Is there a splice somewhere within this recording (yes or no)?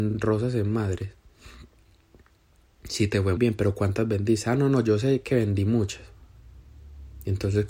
yes